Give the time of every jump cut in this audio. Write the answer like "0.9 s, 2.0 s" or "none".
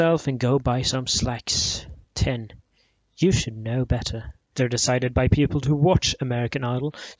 2.0 s, 4.5 s